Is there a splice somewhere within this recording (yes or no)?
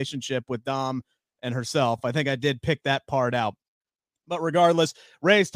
no